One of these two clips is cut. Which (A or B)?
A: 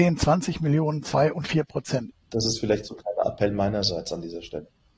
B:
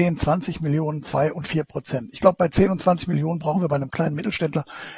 A